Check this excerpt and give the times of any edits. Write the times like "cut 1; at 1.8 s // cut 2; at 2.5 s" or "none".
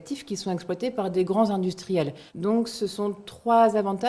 cut 1; at 2.3 s